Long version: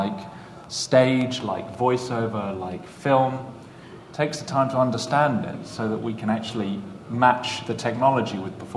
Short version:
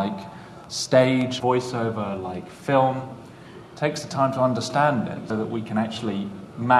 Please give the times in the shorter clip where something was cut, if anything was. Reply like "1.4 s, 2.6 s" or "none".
1.4 s, 5.3 s